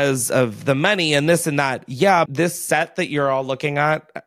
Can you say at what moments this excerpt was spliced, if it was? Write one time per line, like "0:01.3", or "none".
0:02.3